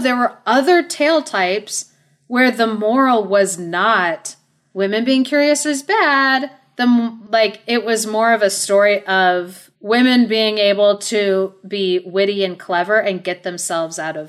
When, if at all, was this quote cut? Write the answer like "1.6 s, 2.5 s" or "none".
none